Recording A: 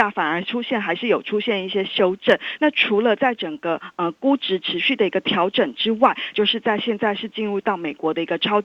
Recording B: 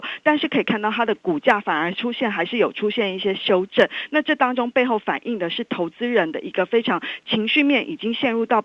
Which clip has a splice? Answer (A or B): A